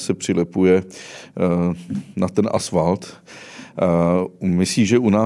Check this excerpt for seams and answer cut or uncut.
uncut